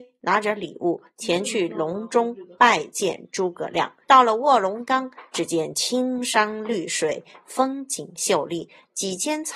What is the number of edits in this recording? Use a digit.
1